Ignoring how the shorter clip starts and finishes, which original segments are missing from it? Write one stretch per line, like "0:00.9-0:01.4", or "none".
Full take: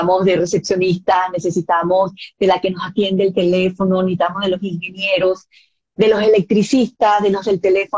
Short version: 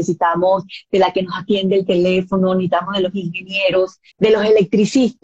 0:05.6-0:05.9